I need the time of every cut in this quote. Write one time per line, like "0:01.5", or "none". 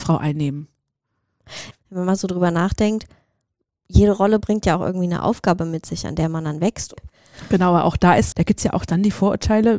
0:01.7
0:06.9
0:08.3

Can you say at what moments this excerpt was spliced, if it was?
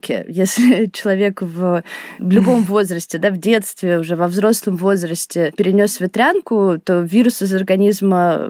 none

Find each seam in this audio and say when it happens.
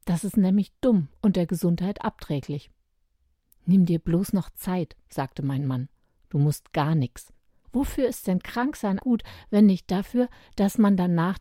0:07.6
0:09.0

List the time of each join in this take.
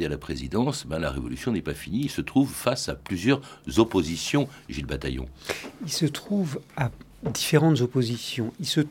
none

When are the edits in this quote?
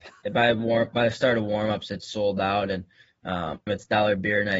0:03.7

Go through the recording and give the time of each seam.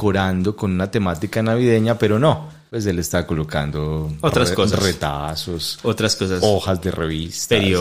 none

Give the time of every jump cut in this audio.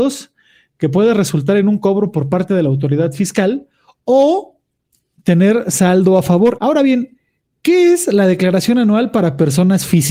0:06.6

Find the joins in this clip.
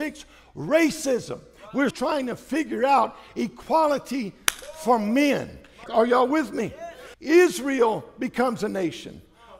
0:01.9
0:05.9
0:07.1

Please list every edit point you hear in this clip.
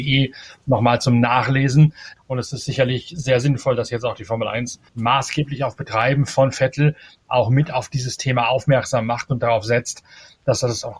0:02.2
0:04.9

